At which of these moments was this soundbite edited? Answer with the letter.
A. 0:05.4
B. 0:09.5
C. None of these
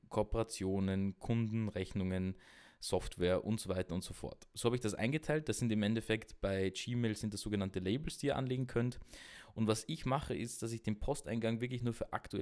C